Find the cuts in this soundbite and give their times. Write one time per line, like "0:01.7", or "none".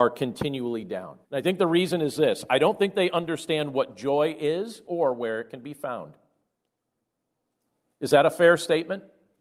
0:01.2

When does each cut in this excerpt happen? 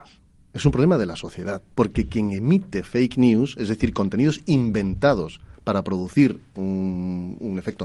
0:01.7

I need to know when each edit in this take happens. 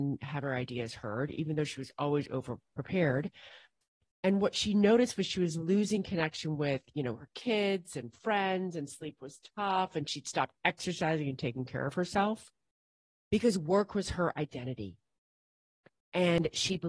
none

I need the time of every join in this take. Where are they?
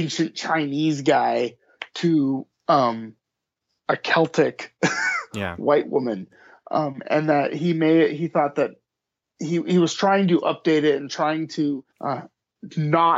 0:11.9

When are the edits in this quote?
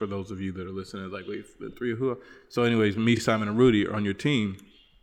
none

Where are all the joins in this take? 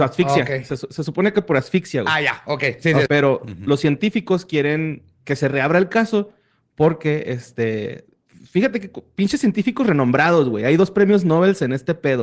0:03.1

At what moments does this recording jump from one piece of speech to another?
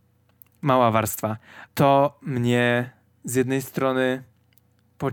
0:01.7

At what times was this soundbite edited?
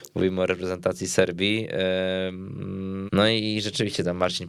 0:03.1

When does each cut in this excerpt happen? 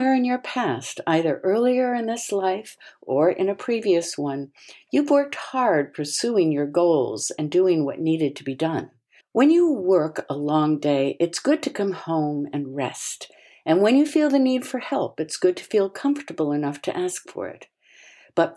0:09.2

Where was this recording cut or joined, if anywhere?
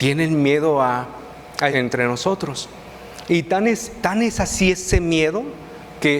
0:01.7

